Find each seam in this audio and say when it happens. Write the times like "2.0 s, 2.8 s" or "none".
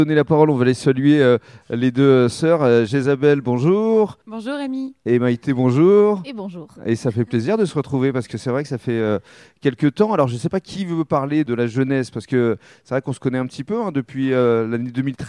none